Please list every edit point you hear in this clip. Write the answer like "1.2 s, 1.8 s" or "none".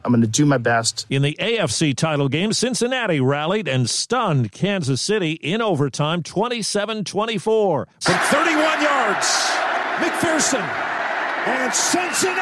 1.1 s, 8.0 s